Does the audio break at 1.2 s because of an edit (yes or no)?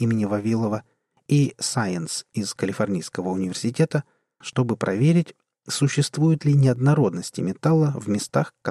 no